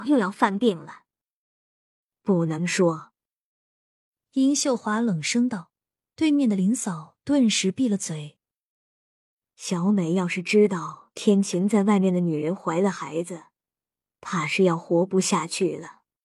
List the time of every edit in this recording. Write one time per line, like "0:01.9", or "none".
none